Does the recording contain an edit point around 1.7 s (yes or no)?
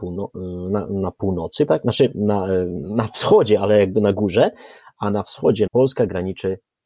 yes